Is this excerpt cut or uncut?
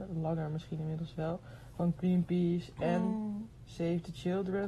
uncut